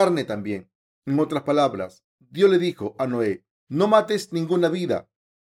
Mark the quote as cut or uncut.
cut